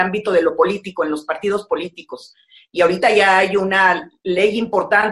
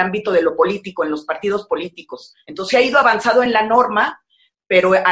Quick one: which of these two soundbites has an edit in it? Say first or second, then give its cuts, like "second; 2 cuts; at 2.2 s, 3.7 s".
second; 1 cut; at 2.4 s